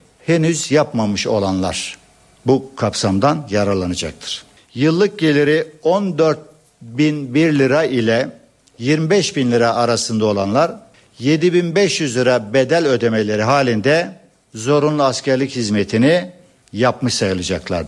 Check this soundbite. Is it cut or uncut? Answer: cut